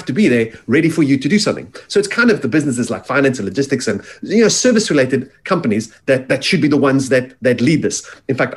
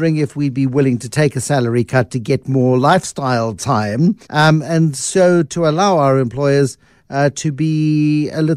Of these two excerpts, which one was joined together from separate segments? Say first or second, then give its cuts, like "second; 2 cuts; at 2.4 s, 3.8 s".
second; 1 cut; at 4.2 s